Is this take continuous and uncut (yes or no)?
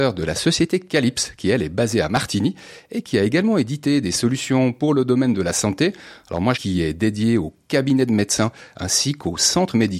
no